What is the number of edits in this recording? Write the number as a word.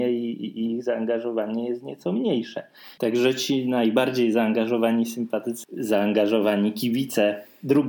two